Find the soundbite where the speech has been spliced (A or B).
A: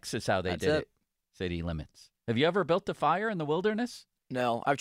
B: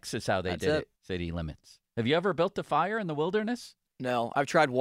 B